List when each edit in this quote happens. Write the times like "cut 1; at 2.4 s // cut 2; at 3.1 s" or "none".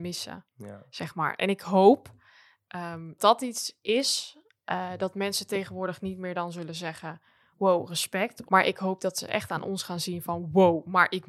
cut 1; at 3.2 s // cut 2; at 8.5 s